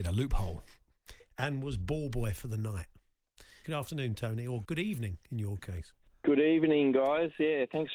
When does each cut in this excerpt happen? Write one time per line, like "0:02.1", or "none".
0:03.6
0:04.6